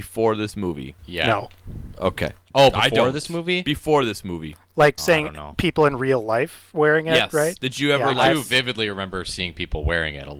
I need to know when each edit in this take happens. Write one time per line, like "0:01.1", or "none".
0:01.0
0:05.0